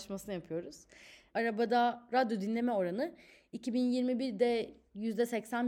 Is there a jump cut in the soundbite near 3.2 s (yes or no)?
no